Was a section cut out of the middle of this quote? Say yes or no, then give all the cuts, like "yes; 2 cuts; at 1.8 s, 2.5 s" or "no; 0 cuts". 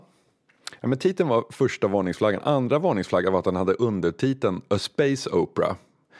no; 0 cuts